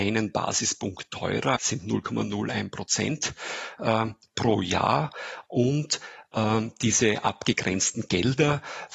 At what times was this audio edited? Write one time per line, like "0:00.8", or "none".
0:01.6
0:05.5